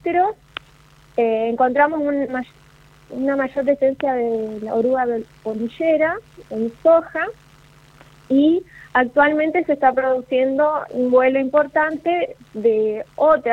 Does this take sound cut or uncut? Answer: cut